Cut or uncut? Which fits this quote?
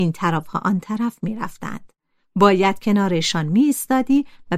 uncut